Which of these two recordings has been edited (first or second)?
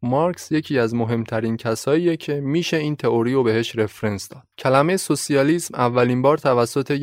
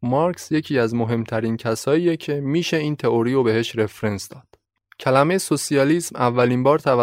first